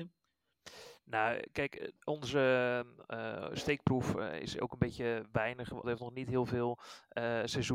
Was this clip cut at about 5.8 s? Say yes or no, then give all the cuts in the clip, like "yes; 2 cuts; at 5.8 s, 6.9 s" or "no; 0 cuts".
yes; 1 cut; at 5.8 s